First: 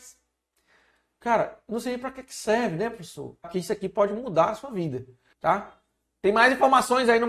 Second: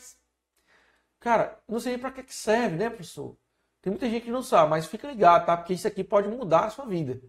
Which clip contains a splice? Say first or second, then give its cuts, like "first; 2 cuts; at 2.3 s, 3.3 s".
first; 2 cuts; at 3.4 s, 5.3 s